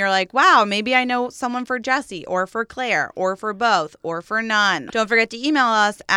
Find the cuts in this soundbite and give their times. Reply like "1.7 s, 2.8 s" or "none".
4.9 s